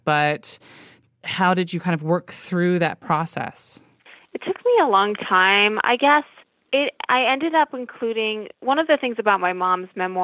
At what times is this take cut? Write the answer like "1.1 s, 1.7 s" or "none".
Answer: none